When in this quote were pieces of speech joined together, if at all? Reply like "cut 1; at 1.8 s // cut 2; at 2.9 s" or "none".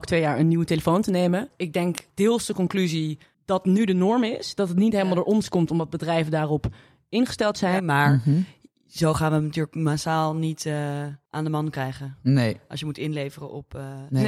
cut 1; at 7.8 s